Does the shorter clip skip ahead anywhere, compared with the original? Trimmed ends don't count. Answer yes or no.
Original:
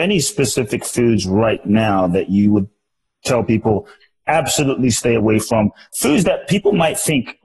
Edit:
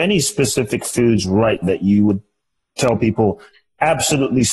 yes